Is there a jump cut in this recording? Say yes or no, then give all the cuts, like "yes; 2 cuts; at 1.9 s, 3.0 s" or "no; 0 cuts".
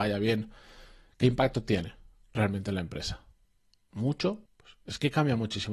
yes; 1 cut; at 4.5 s